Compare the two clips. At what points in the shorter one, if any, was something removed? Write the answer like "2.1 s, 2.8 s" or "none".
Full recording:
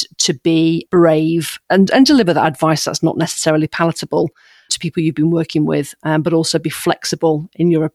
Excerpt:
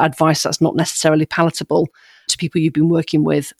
none